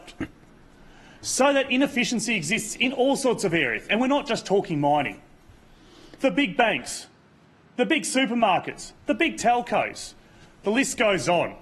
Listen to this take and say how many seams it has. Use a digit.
1